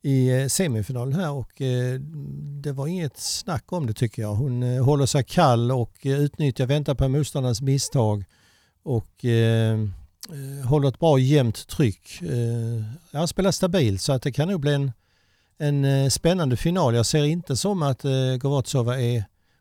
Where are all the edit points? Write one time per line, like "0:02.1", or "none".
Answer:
none